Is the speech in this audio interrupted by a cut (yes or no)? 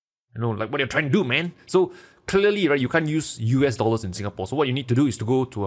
no